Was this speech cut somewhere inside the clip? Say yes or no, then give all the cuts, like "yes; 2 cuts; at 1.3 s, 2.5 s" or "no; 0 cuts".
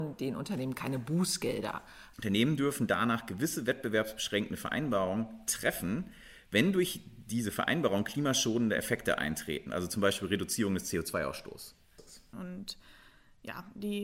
yes; 2 cuts; at 2.1 s, 12.3 s